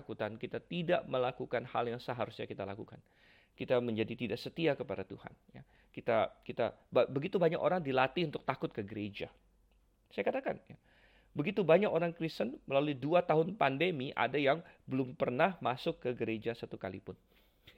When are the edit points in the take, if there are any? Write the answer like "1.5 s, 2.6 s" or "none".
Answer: none